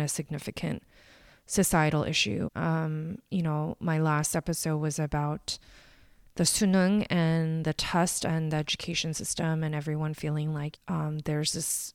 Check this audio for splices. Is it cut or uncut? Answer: cut